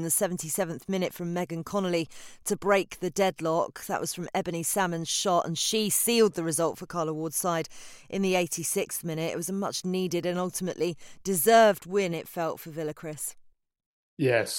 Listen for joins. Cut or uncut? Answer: uncut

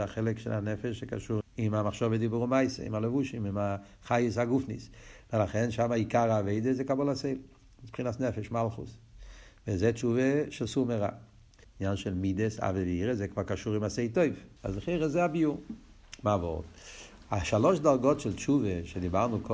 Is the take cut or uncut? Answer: cut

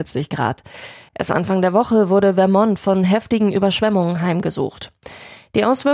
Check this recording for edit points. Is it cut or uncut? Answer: cut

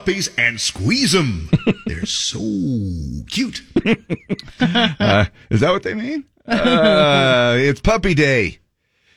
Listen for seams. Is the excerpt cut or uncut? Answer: uncut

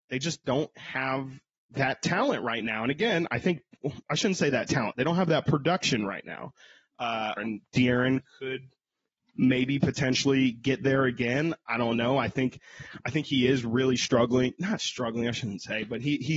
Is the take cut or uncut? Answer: cut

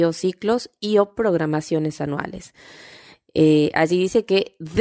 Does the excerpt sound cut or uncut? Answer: uncut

